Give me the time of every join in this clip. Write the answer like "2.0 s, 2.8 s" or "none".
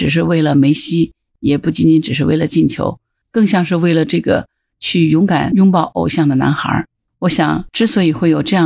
7.1 s

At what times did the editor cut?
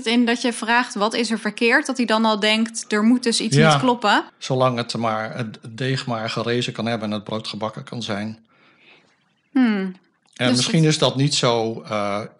4.3 s

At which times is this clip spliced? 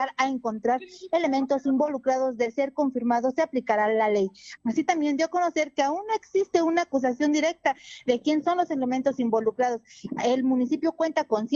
4.6 s

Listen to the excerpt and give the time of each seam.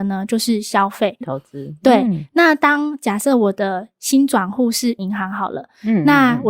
1.2 s

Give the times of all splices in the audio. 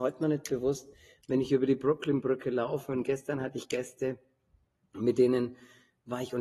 none

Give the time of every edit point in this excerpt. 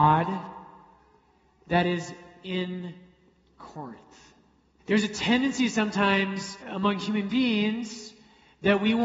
4.8 s, 6.6 s

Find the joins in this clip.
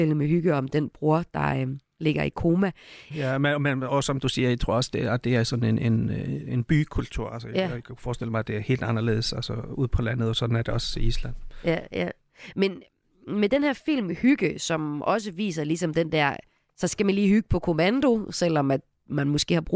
3.1 s

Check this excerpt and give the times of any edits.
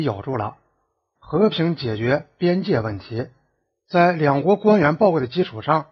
1.2 s

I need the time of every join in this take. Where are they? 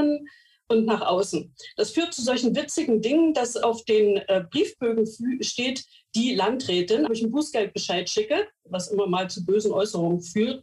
7.1 s

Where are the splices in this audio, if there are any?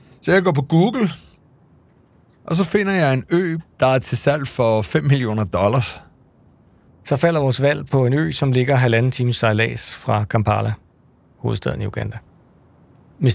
6.9 s

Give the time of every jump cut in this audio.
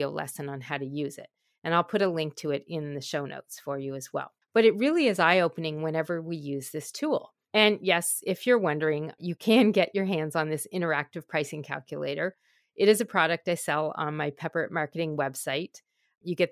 4.4 s

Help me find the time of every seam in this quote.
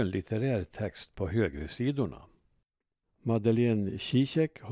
3.0 s

